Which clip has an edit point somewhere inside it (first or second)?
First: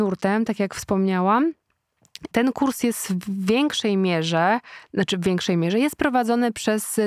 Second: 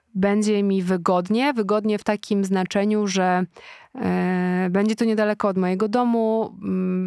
first